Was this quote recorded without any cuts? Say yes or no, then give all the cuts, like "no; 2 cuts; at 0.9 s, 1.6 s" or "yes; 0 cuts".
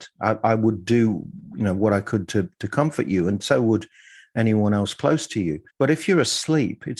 no; 1 cut; at 5.7 s